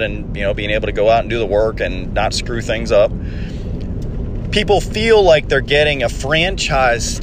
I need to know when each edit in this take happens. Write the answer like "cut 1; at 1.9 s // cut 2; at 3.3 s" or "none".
none